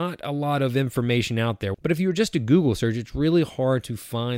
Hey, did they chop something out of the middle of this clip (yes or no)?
yes